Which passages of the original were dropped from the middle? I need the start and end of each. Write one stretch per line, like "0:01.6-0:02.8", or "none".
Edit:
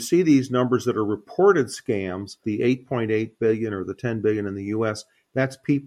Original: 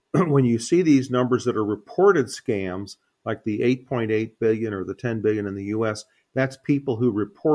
0:03.0-0:03.4